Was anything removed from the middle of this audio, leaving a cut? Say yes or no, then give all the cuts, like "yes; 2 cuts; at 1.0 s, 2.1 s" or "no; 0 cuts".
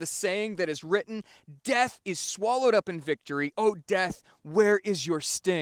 yes; 1 cut; at 3.5 s